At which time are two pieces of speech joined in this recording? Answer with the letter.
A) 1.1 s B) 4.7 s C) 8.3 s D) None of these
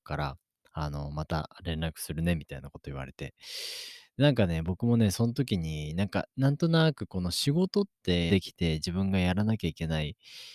C